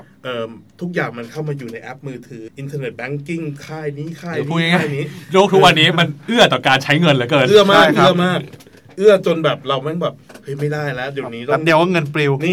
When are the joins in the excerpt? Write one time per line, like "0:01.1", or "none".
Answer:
0:02.5

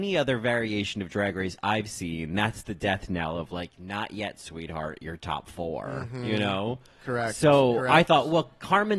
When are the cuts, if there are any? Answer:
none

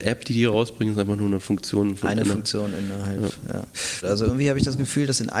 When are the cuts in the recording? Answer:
0:04.0

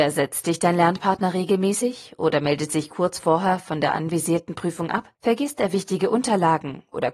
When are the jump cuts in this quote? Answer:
0:05.1

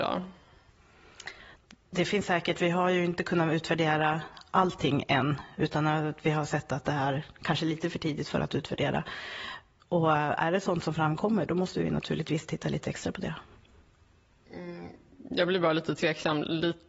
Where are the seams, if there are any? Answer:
none

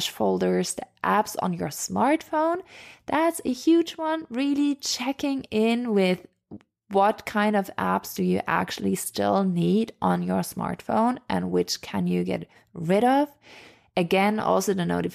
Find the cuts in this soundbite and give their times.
none

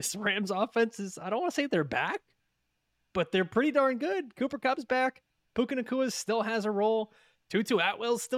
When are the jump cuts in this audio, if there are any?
none

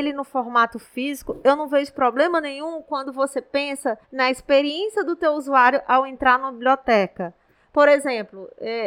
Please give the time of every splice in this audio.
0:04.0

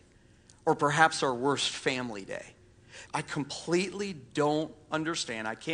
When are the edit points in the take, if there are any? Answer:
0:03.1

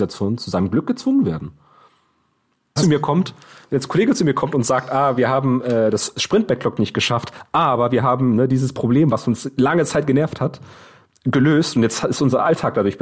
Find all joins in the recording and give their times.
0:02.8

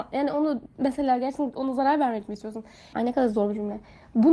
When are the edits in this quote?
0:02.9

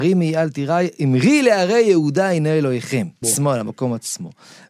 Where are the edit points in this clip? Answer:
0:03.2

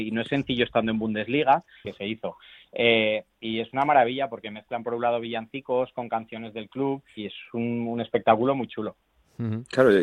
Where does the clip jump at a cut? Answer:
0:01.8
0:07.2

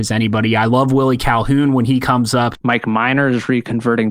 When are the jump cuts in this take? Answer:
0:02.5

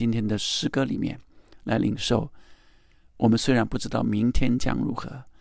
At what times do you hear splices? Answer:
none

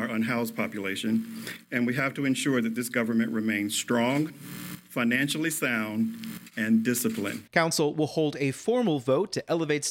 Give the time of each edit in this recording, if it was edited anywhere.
0:04.3
0:07.5

